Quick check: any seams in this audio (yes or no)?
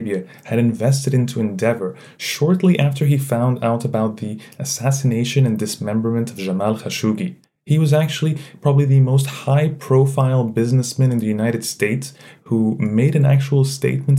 no